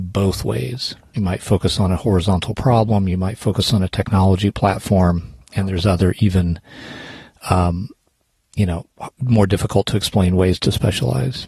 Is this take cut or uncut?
cut